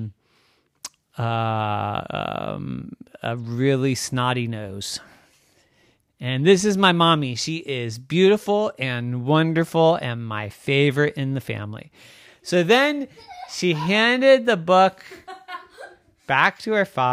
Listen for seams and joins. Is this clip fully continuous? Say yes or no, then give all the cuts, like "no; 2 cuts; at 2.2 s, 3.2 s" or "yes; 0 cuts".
yes; 0 cuts